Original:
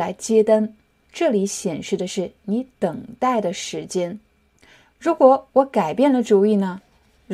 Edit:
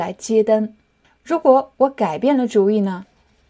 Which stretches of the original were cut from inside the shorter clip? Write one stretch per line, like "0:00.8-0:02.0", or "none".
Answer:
0:01.0-0:04.8

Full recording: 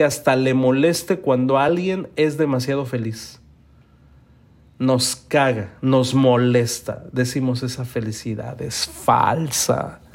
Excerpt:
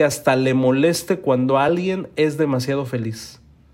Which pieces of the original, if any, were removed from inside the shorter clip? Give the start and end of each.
none

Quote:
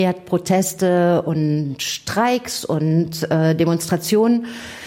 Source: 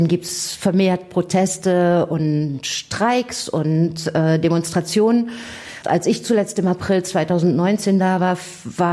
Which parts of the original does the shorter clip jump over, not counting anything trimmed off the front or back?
none

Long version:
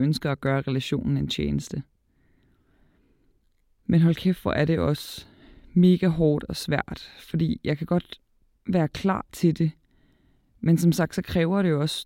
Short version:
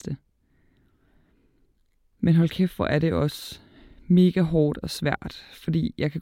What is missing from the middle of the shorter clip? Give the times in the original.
none

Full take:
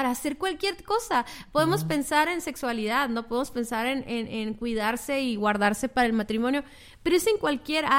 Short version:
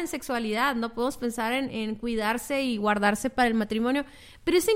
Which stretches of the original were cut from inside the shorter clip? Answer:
0:04.0-0:04.3

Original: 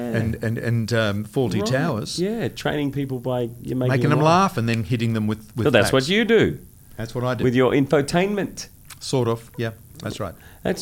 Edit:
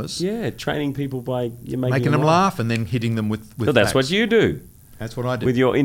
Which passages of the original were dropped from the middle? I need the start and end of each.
none

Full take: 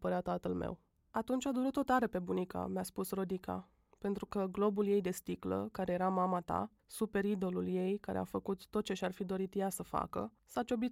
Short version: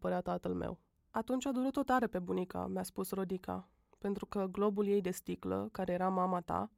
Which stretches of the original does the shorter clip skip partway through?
none

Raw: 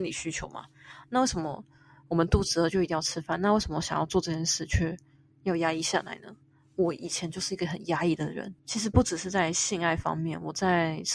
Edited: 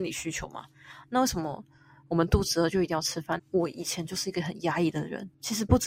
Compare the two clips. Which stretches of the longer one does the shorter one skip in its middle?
0:03.4-0:06.6

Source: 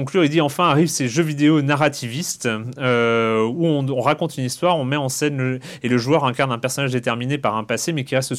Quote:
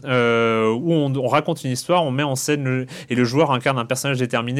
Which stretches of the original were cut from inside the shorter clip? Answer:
none

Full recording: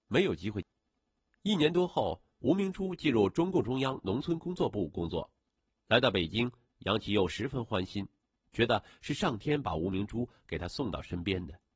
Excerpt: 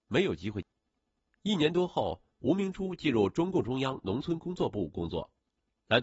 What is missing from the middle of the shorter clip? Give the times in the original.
none

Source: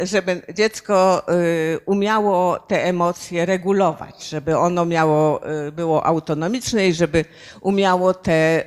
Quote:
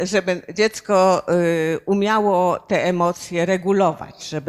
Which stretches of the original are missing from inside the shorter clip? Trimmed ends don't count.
none

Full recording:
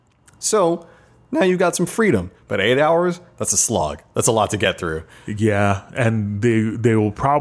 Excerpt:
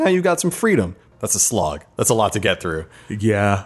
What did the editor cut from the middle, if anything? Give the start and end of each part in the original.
0:02.5-0:03.3

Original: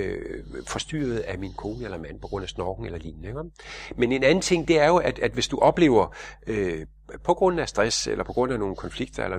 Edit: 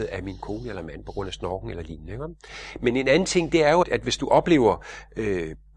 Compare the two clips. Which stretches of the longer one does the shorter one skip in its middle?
0:05.0-0:05.1

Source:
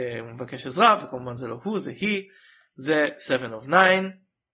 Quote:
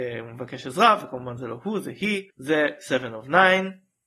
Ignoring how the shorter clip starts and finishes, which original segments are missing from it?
0:02.3-0:02.7

